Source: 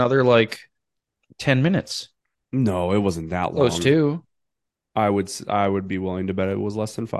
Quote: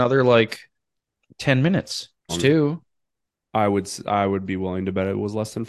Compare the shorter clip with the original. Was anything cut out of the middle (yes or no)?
yes